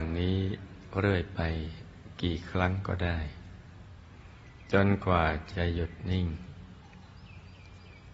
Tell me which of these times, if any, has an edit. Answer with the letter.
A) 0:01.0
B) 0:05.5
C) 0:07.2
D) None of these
B